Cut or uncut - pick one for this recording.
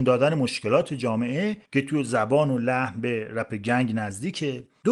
cut